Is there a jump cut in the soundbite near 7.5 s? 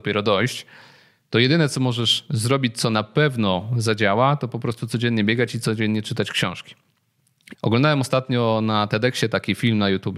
yes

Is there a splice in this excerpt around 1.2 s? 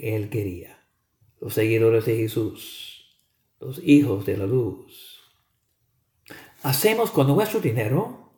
yes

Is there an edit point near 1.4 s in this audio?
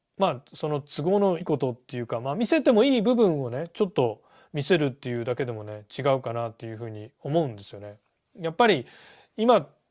yes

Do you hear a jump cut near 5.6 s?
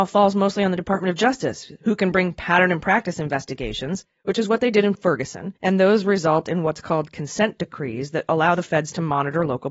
yes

